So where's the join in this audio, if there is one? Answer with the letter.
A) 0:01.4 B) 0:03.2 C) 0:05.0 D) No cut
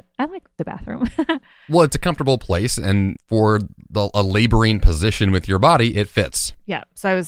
B